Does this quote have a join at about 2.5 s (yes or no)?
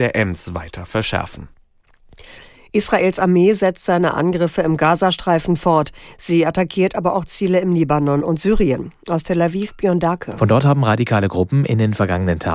no